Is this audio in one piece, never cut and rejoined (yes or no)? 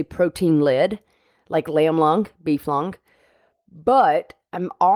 yes